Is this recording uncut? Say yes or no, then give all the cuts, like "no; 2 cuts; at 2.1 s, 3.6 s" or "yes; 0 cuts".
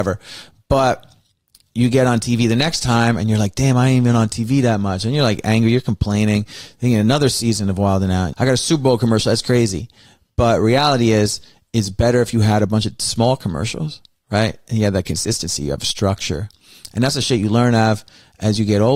no; 1 cut; at 8.3 s